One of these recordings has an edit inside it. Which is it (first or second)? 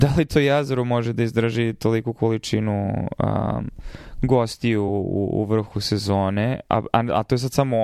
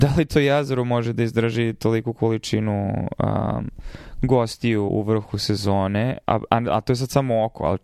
second